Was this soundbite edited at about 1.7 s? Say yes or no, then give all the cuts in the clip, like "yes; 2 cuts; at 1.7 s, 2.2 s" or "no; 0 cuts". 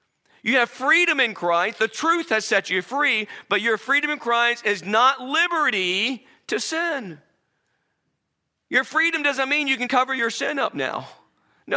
no; 1 cut; at 9.9 s